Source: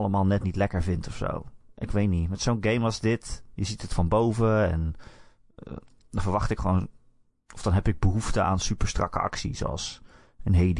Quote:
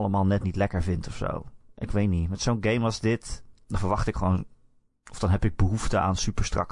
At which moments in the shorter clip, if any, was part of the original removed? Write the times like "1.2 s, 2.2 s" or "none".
3.5 s